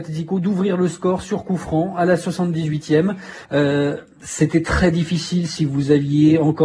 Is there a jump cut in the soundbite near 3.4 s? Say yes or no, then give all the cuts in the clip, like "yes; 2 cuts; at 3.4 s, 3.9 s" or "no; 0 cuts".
yes; 1 cut; at 3.4 s